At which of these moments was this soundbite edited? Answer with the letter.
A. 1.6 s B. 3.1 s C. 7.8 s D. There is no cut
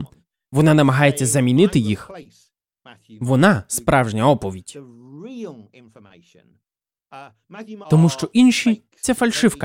C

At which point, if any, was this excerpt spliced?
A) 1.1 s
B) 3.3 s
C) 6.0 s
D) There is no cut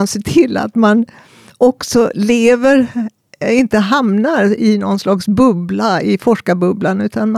D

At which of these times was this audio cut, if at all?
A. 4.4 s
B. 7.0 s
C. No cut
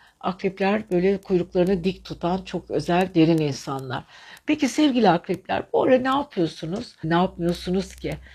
B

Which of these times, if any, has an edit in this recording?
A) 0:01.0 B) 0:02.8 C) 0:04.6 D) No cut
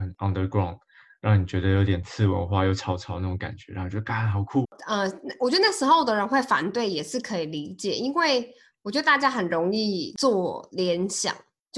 C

